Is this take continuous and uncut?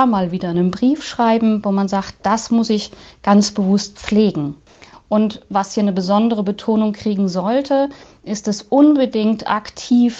no; 1 cut; at 4.9 s

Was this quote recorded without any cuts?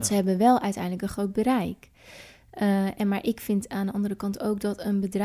yes; 0 cuts

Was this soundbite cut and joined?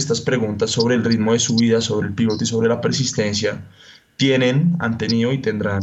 no; 0 cuts

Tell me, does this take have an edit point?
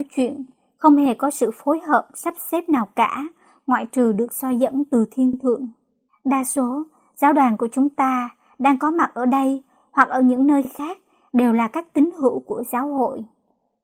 yes; 1 cut; at 6.1 s

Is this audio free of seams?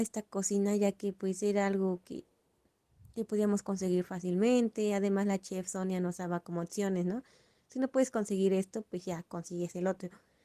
yes; 0 cuts

